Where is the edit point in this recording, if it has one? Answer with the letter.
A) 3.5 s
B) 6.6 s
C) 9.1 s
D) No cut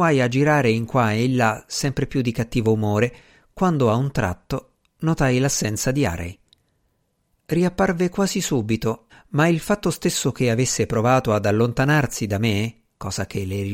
C